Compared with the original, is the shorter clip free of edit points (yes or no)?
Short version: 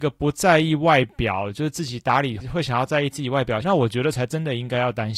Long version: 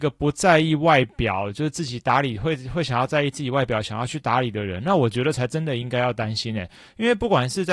no